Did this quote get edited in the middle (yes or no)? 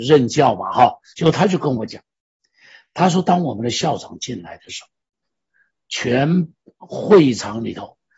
yes